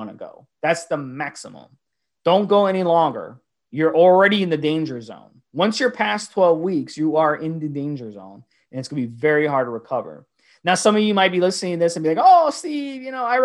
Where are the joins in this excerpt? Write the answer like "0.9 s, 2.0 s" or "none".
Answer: none